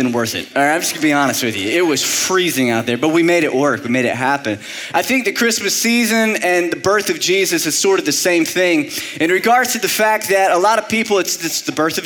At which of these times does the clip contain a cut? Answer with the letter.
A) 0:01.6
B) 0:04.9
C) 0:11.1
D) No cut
B